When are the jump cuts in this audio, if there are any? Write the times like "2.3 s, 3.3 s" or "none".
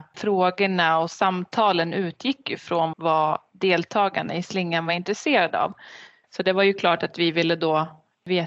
2.9 s, 6.2 s

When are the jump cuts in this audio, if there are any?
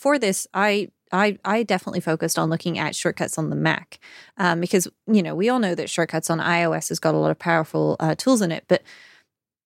none

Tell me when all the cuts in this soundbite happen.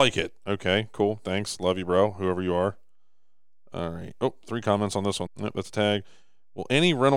5.3 s

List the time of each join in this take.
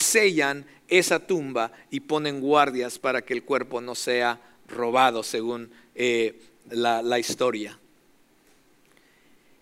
6.7 s

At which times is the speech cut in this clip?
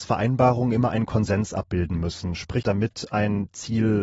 2.6 s

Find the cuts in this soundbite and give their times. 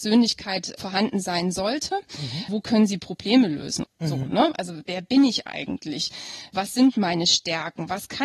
2.5 s, 3.8 s

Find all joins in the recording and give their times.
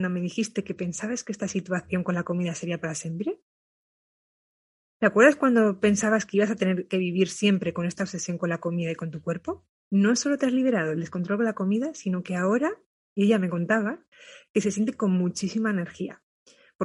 9.8 s

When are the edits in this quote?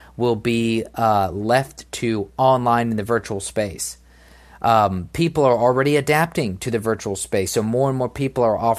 none

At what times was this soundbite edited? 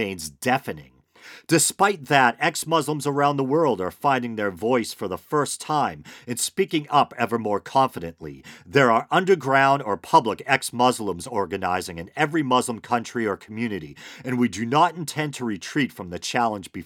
none

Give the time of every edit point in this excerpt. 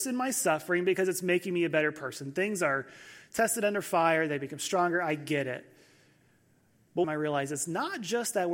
7.0 s

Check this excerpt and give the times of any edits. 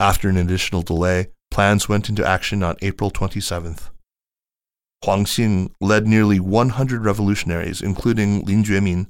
none

